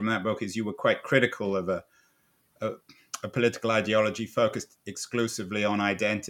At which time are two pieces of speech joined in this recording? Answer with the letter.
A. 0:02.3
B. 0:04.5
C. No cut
C